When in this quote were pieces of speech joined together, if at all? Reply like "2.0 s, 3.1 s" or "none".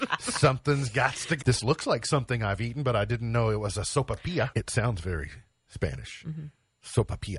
1.4 s, 4.5 s